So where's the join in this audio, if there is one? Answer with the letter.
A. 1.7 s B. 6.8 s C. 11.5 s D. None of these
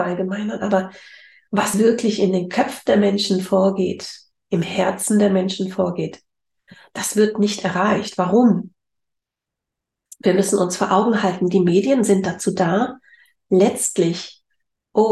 D